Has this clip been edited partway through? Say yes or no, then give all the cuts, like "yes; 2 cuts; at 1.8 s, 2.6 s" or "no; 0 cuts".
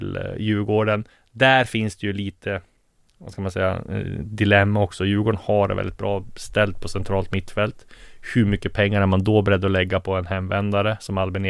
no; 0 cuts